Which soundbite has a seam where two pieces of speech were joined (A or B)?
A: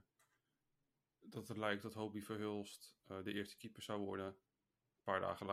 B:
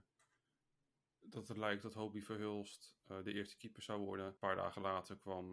B